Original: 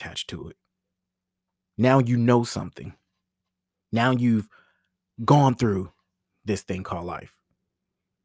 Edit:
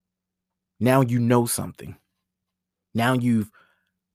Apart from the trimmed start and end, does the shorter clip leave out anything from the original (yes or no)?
no